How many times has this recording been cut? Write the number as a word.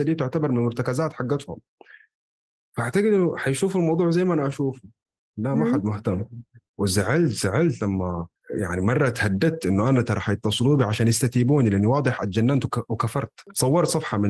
zero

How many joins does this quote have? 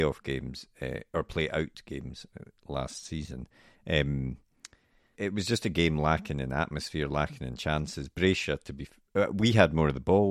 one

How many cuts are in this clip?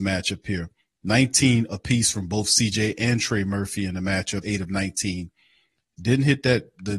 one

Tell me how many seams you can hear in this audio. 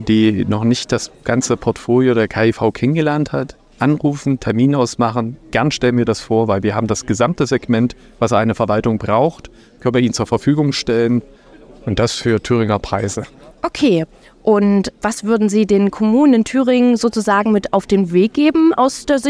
one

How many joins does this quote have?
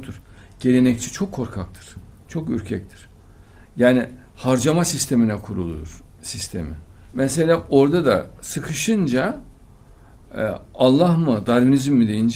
one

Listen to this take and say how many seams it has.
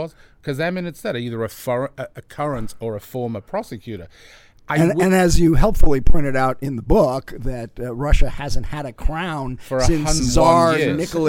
one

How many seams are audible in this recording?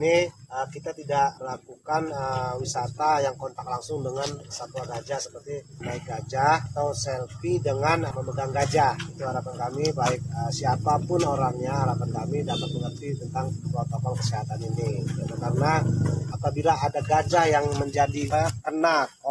one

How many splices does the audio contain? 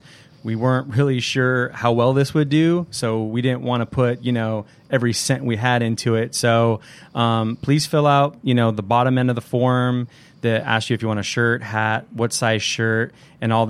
zero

